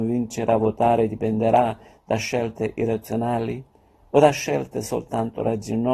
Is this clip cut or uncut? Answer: uncut